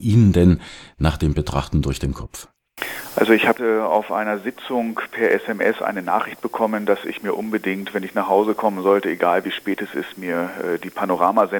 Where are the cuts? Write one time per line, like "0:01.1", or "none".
none